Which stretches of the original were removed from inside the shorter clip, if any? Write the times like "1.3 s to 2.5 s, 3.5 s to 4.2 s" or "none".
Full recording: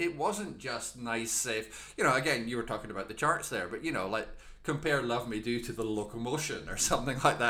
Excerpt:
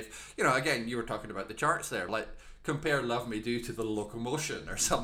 3.7 s to 4.1 s

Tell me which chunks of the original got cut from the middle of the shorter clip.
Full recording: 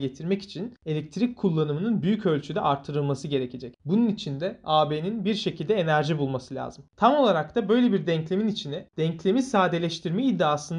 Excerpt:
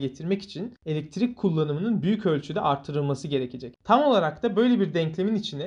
3.8 s to 6.9 s

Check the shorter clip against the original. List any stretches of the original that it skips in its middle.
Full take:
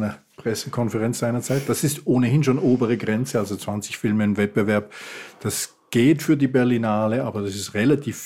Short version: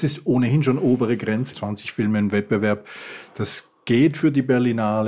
3.3 s to 3.6 s

